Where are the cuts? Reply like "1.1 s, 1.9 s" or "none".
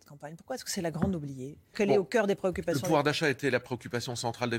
1.7 s